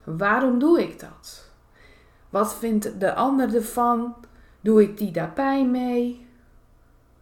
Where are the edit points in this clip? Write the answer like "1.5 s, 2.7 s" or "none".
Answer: none